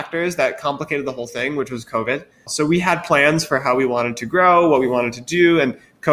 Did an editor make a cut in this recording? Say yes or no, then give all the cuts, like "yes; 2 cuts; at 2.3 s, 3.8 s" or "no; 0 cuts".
yes; 1 cut; at 2.5 s